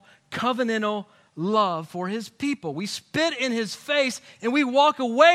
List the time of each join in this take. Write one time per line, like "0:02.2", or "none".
none